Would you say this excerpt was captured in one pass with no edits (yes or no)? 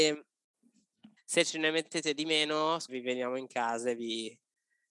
no